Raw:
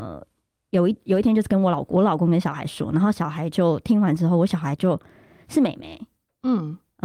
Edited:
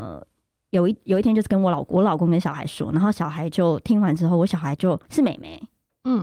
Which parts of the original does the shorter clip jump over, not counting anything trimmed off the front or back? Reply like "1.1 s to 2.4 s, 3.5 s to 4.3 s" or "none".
5.0 s to 5.4 s